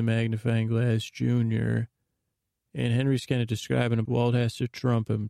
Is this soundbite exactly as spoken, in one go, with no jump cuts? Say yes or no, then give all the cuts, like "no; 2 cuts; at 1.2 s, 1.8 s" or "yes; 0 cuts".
no; 1 cut; at 4.0 s